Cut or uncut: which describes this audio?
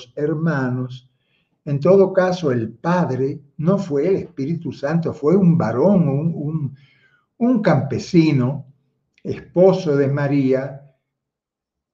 uncut